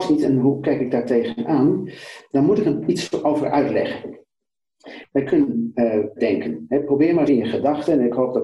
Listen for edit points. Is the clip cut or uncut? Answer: cut